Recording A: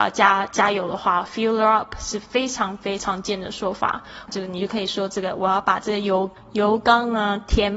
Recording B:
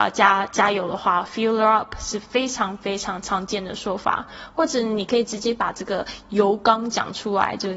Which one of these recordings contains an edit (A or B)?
A